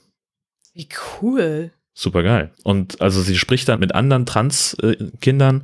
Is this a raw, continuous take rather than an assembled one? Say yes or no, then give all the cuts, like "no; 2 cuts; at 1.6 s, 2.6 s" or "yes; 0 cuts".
no; 2 cuts; at 2.5 s, 3.8 s